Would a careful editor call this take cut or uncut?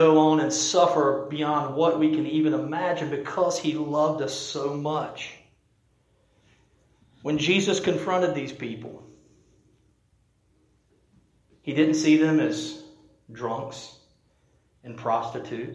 uncut